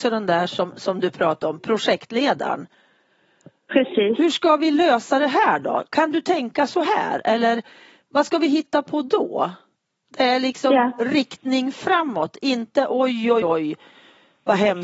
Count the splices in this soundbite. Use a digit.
1